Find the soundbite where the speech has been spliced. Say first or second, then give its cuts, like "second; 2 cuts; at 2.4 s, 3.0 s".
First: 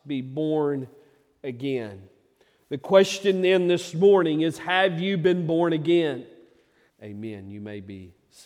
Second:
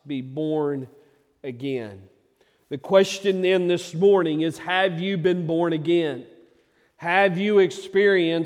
first; 1 cut; at 6.9 s